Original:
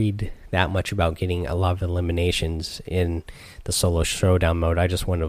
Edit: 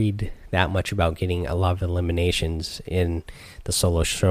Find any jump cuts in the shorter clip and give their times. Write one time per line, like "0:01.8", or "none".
none